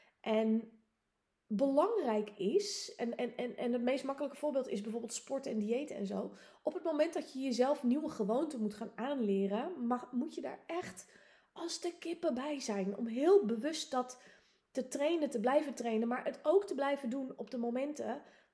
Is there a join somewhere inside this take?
no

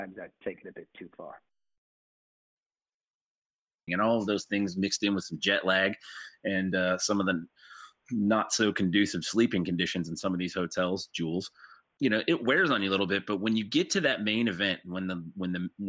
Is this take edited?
yes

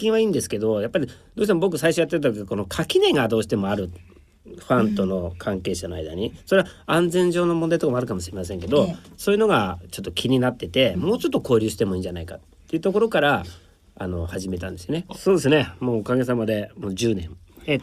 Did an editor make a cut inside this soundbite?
yes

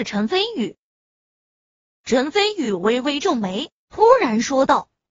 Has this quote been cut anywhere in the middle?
no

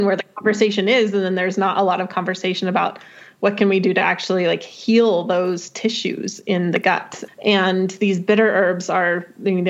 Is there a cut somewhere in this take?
yes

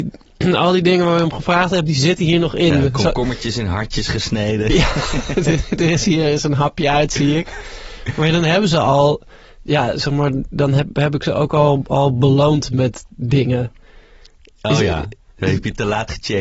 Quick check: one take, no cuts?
no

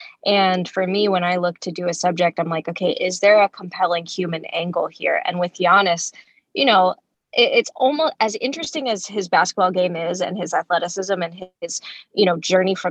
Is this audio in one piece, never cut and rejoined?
no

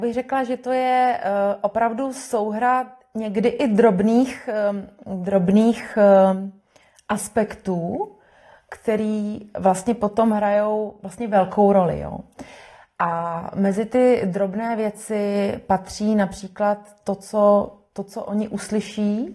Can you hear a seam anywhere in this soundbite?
no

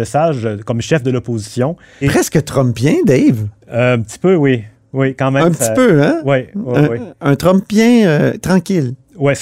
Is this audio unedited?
no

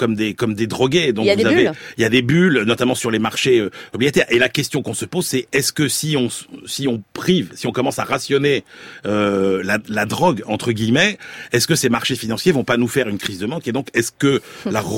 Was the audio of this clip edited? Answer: no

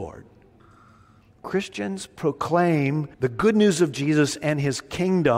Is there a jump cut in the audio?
yes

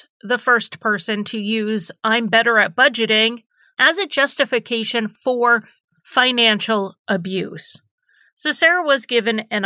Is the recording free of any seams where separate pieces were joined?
yes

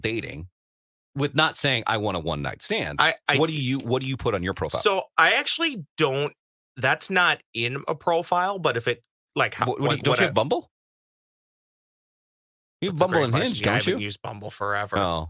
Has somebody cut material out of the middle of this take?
no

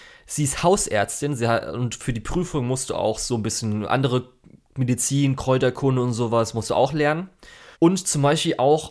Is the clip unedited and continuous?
no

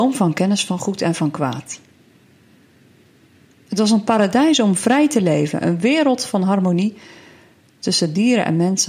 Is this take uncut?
no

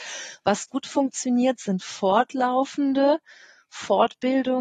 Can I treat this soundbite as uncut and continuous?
yes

